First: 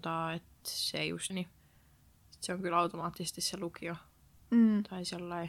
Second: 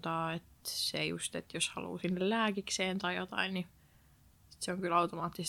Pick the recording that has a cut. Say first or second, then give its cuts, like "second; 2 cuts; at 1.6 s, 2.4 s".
first; 1 cut; at 1.3 s